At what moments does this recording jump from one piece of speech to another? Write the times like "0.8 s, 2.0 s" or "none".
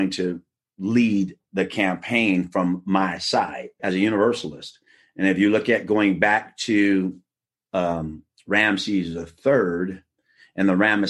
3.8 s